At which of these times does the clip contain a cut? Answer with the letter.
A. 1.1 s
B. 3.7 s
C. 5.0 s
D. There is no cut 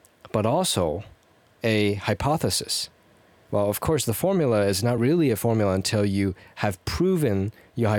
D